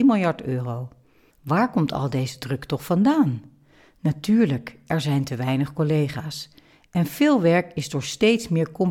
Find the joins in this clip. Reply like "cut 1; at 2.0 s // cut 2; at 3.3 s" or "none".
none